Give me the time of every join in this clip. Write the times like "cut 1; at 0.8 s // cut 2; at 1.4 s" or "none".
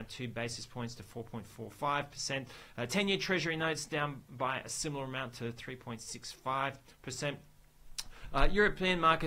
none

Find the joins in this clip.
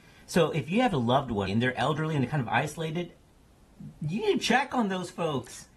cut 1; at 1.5 s

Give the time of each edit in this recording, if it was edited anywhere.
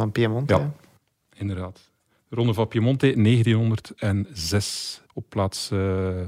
cut 1; at 5.0 s

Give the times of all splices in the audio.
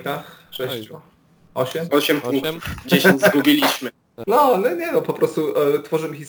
cut 1; at 4.2 s

